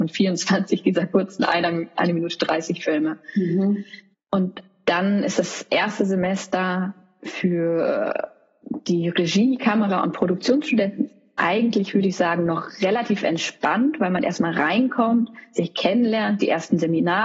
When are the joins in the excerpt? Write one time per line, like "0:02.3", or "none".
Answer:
0:04.1